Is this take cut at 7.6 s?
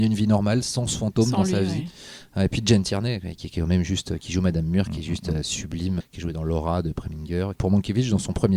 yes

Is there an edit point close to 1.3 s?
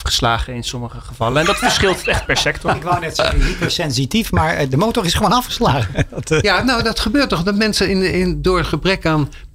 no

